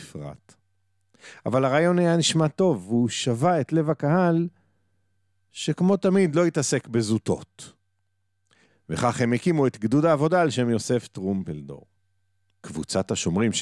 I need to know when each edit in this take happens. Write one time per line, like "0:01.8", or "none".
0:08.7
0:12.5